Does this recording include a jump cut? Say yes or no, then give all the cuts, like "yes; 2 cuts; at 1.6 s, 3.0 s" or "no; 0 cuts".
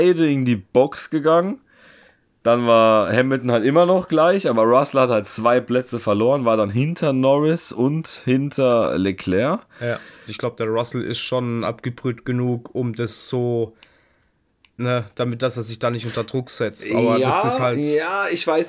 yes; 1 cut; at 10.3 s